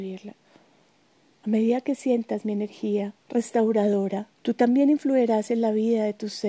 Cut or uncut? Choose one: cut